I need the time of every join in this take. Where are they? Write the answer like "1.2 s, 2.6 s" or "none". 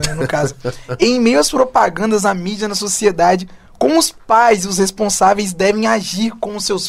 none

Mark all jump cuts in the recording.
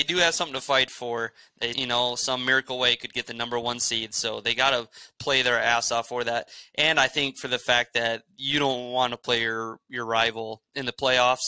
1.7 s

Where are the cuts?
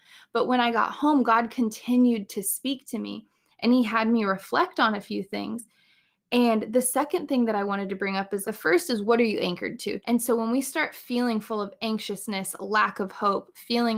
8.4 s, 10.0 s

